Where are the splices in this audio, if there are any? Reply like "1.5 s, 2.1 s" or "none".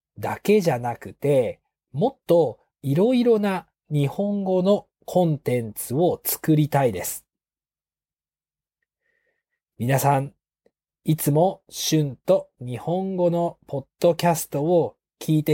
none